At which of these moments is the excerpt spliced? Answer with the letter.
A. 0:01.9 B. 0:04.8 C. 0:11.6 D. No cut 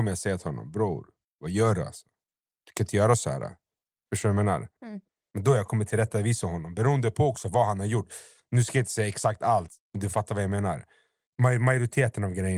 B